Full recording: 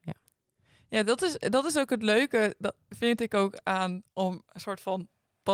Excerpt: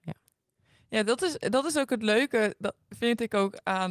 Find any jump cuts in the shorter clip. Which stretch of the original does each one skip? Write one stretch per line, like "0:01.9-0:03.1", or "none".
none